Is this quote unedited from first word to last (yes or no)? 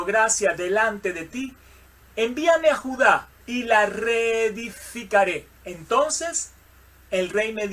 no